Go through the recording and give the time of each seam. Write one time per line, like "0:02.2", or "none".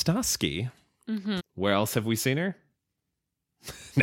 0:01.4
0:02.8